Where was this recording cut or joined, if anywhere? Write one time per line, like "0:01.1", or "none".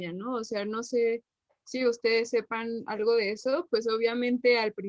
0:03.7